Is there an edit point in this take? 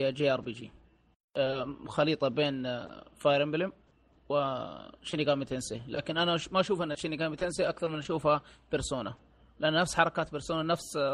no; 0 cuts

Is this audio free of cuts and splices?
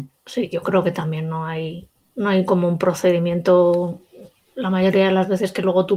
yes; 0 cuts

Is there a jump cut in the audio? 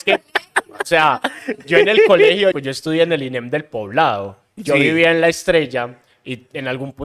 yes; 1 cut; at 2.5 s

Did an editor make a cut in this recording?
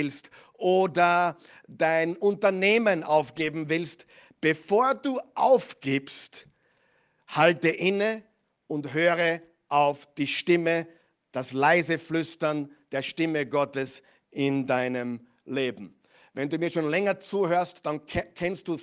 no; 0 cuts

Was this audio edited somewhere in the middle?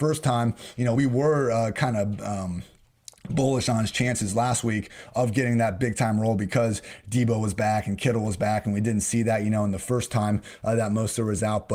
no; 0 cuts

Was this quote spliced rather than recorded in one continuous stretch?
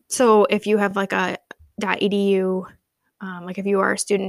no; 0 cuts

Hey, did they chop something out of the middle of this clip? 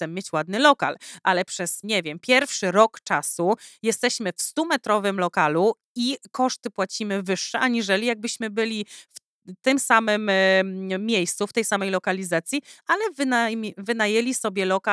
yes; 1 cut; at 1.8 s

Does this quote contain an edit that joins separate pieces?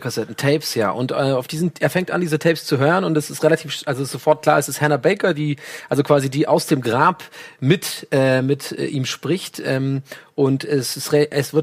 no; 0 cuts

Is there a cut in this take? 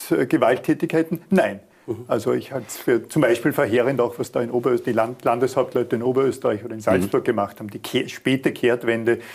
no; 0 cuts

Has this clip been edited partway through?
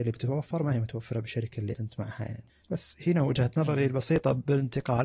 yes; 1 cut; at 1.7 s

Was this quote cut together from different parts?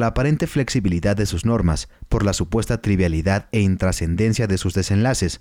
no; 0 cuts

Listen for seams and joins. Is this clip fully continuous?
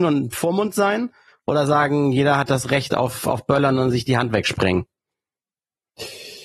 yes; 0 cuts

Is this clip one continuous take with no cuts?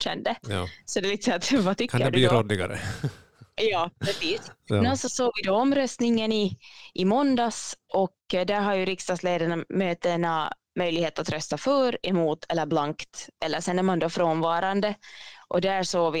yes; 0 cuts

